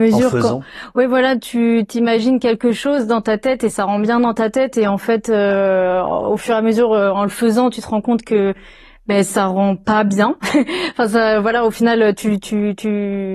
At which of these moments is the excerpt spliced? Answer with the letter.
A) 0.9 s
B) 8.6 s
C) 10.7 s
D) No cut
D